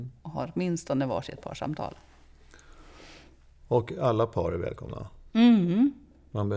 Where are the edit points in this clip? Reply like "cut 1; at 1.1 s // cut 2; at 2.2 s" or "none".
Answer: none